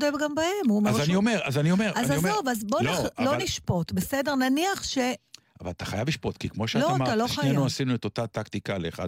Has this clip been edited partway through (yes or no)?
no